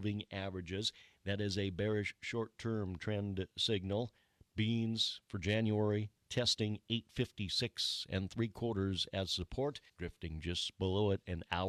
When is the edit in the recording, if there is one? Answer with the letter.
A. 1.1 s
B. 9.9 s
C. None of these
B